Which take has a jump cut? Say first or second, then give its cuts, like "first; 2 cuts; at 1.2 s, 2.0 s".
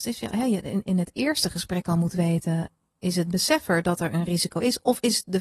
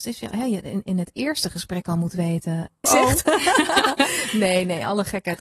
second; 1 cut; at 2.8 s